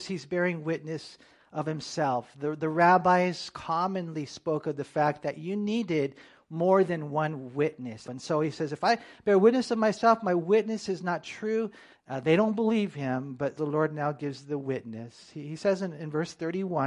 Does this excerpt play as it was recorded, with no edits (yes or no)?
no